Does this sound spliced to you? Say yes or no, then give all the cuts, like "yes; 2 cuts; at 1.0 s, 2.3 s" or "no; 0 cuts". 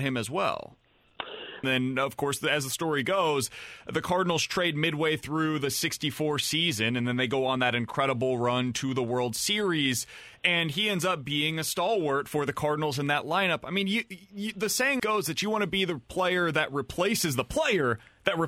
yes; 2 cuts; at 1.6 s, 15.0 s